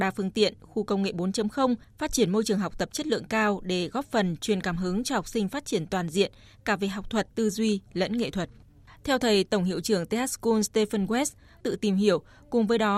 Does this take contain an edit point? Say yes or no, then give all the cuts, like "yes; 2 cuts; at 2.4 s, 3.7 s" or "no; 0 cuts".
yes; 2 cuts; at 7.3 s, 11.6 s